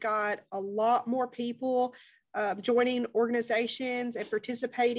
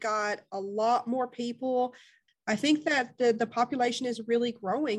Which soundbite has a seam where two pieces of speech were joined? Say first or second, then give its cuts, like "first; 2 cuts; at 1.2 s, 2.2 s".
second; 1 cut; at 2.3 s